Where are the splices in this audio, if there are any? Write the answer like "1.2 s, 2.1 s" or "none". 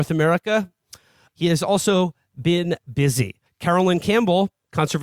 1.3 s, 3.5 s